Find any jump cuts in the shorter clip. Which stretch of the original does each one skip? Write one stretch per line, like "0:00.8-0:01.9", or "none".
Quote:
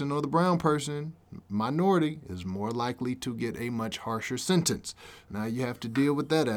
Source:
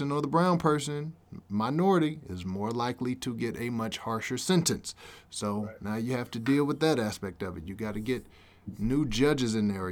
0:05.3-0:05.8